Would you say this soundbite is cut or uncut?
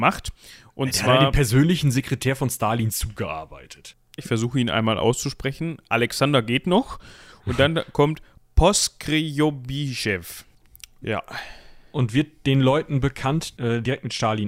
cut